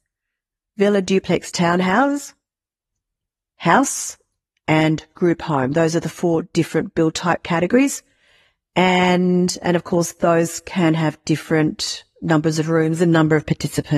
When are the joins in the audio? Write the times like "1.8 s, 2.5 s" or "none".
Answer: none